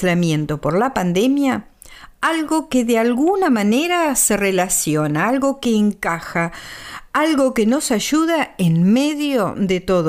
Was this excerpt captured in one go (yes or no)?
yes